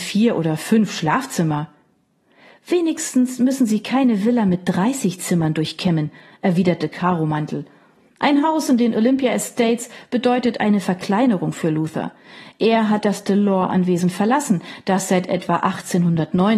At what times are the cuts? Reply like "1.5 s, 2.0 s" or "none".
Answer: none